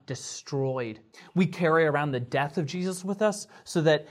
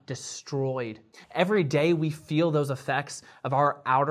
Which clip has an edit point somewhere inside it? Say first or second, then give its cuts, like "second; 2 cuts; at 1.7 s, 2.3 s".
second; 1 cut; at 1.2 s